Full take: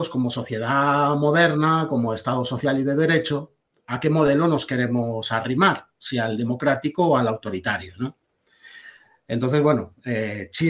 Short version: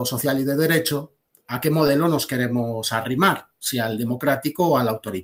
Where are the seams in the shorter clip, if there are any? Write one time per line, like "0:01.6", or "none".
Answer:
none